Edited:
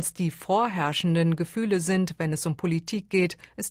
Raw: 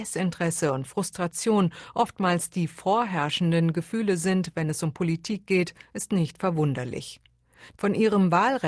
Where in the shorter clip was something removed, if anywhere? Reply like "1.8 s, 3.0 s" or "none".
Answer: none